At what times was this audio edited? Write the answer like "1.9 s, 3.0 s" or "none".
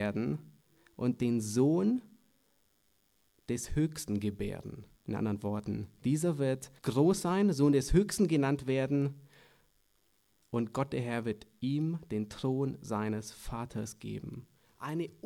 4.9 s, 6.8 s